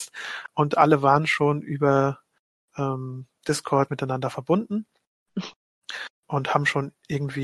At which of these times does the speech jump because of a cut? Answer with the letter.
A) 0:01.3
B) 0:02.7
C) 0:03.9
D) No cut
C